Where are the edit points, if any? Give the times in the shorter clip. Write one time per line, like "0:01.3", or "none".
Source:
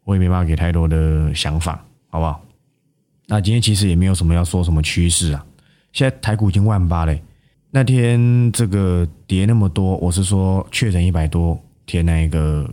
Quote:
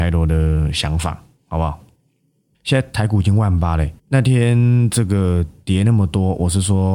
0:02.5
0:04.0